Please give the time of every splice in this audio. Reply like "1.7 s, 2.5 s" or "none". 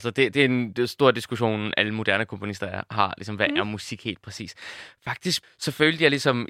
5.4 s

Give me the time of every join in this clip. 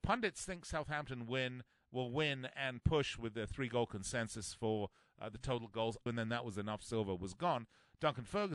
6.1 s

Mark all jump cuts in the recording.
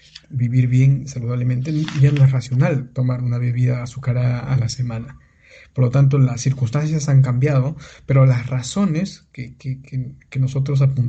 none

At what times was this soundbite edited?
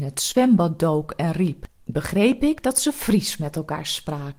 1.7 s

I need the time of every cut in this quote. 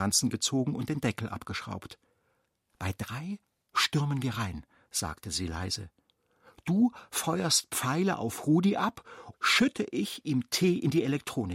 9.3 s

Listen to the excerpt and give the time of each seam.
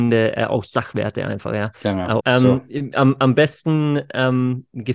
2.2 s

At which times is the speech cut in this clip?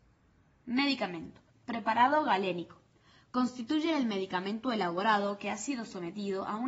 1.5 s

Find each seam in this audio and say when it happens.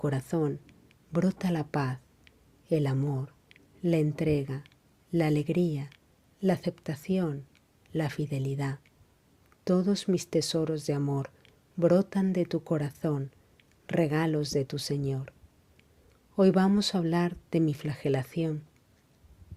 none

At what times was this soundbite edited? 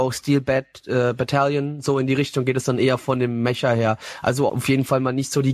4.5 s

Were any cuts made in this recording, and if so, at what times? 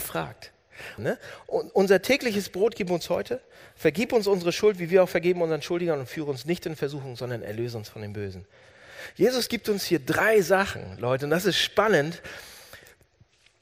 1.0 s

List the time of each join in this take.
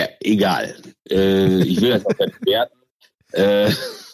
none

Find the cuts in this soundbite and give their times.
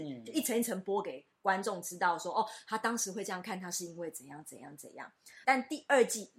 5.4 s

